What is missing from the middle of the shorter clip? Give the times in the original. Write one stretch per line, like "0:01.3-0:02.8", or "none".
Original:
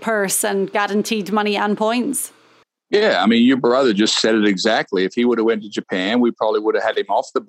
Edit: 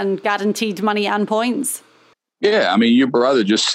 none